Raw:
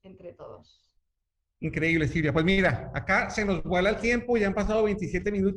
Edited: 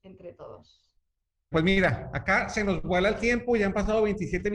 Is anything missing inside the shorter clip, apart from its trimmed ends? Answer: yes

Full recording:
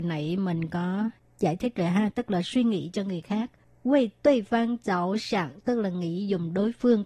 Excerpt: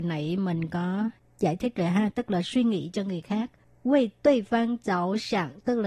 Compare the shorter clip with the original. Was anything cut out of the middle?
no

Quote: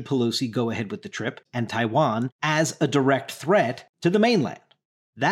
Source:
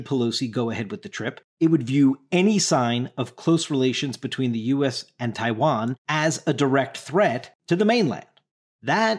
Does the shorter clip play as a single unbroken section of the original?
no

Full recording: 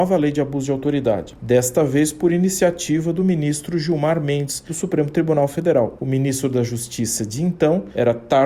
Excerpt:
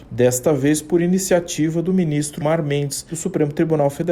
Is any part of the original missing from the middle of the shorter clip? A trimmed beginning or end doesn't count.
yes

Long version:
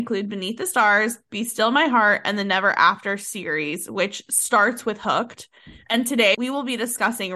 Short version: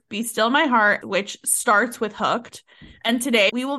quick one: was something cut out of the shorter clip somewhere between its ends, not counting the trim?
yes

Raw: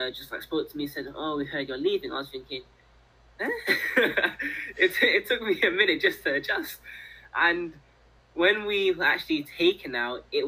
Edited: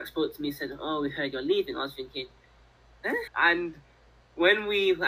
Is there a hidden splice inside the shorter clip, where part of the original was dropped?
yes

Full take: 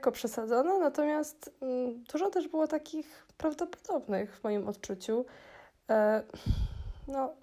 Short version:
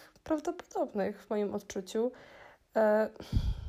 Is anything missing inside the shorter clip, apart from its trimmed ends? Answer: no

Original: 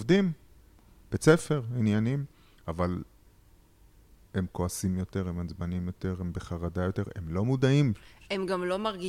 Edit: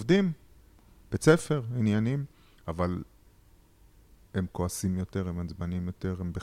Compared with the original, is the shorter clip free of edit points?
yes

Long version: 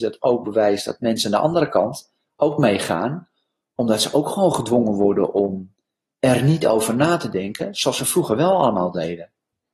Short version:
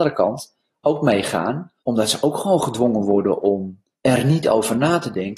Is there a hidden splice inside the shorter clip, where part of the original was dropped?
yes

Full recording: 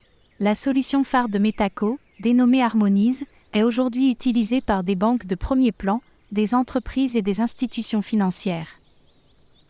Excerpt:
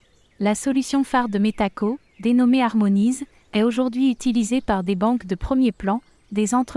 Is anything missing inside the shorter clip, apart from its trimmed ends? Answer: no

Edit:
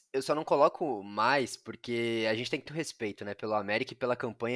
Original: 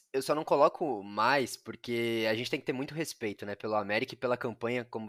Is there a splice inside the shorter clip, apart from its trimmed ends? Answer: yes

